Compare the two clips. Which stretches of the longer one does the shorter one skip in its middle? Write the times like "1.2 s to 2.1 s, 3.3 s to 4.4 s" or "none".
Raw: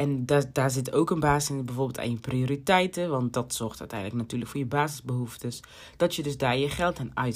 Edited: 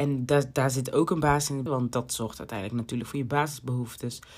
1.7 s to 3.1 s